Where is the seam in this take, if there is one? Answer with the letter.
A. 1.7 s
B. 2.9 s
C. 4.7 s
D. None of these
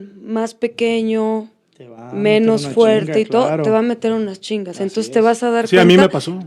D